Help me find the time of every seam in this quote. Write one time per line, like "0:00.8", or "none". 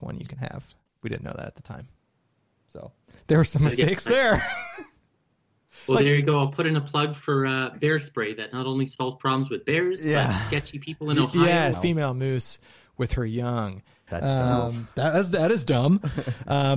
0:11.7
0:14.1